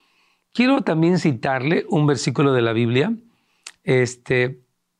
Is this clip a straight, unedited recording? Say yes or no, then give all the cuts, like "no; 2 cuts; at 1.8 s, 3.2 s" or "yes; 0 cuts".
yes; 0 cuts